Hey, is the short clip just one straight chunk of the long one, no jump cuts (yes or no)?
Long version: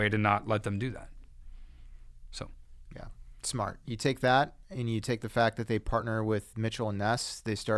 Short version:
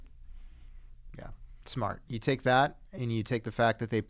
no